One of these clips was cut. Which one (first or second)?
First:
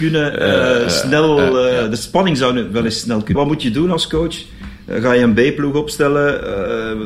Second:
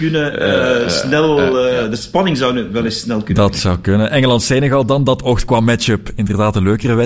first